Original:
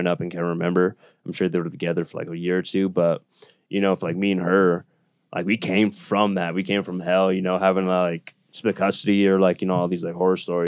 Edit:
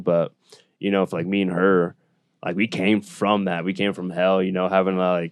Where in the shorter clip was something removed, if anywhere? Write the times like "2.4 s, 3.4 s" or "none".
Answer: none